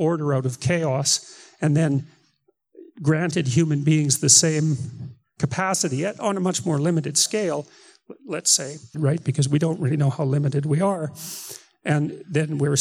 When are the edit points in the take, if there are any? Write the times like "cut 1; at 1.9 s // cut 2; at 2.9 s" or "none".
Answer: cut 1; at 8.9 s